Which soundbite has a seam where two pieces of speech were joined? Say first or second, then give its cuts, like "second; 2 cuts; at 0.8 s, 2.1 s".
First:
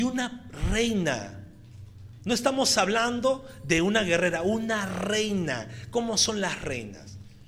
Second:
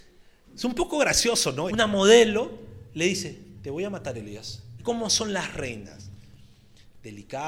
second; 2 cuts; at 1.7 s, 4.8 s